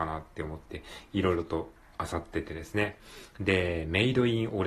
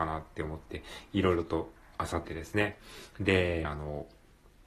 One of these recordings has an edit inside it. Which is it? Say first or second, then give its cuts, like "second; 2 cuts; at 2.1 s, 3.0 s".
second; 2 cuts; at 2.2 s, 3.6 s